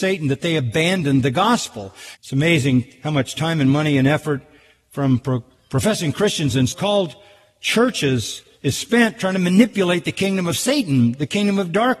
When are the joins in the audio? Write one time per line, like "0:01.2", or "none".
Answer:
0:02.1
0:06.7

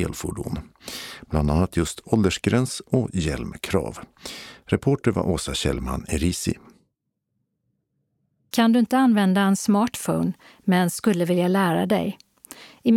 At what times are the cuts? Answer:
none

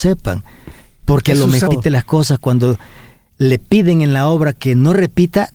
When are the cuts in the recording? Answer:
0:01.7

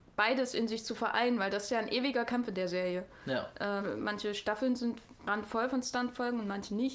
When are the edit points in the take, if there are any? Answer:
0:03.8
0:05.2

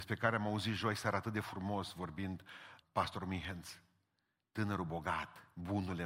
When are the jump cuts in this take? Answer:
0:02.8

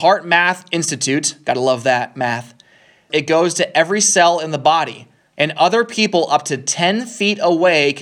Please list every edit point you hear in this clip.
0:03.1
0:05.3

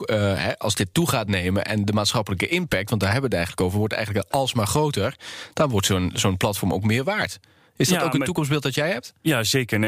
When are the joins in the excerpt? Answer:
none

